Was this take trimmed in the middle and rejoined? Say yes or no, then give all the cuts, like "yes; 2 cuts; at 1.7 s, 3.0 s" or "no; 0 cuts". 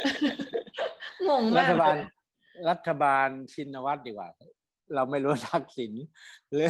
no; 0 cuts